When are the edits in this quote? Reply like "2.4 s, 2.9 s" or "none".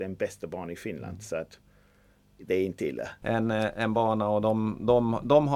3.2 s